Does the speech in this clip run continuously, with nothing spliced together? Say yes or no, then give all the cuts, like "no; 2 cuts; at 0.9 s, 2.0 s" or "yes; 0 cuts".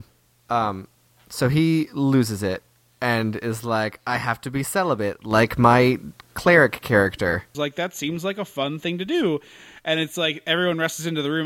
no; 1 cut; at 7.5 s